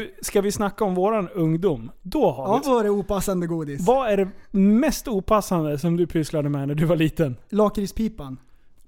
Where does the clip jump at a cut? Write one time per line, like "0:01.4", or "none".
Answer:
0:02.6